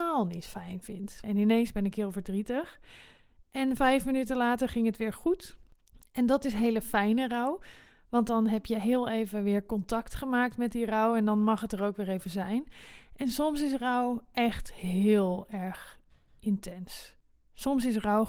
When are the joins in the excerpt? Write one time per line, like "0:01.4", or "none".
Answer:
0:01.2